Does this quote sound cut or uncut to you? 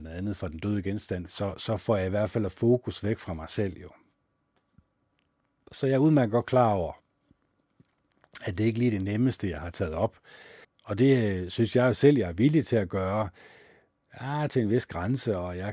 cut